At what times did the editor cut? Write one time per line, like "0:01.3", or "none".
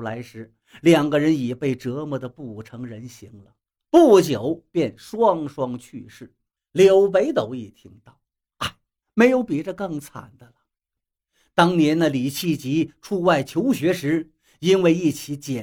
0:06.6
0:09.0
0:11.0

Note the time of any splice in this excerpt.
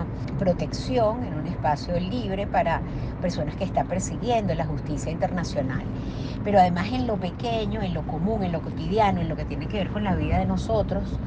none

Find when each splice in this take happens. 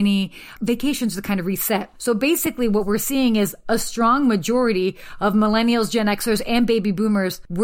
0:01.9

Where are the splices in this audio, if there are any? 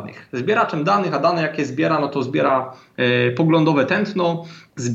none

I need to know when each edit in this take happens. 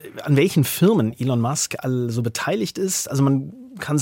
none

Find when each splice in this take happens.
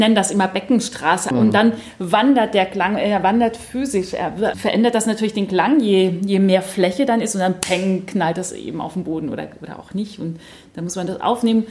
0:01.3
0:04.5

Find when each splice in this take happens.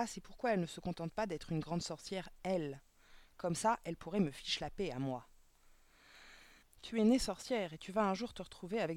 0:06.6

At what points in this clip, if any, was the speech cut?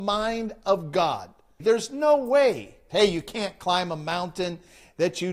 0:01.6
0:02.9

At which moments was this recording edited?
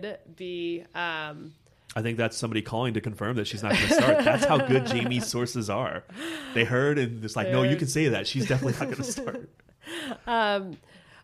none

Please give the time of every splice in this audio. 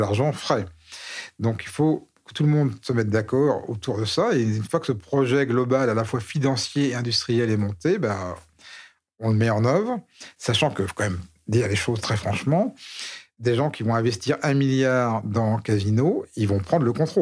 none

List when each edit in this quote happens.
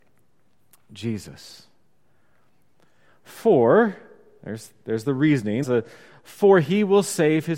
0:03.1
0:05.6

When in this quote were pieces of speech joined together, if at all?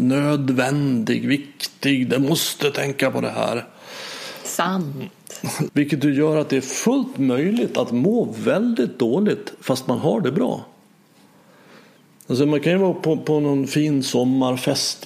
0:05.7

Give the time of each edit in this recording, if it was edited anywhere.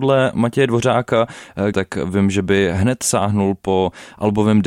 0:01.7

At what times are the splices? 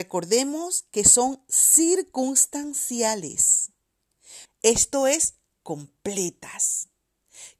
0:04.5

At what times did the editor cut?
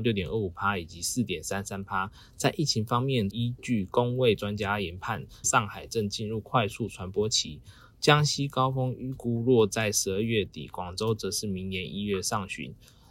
0:03.3
0:05.4

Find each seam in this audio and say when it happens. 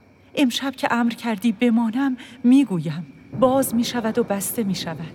0:03.3

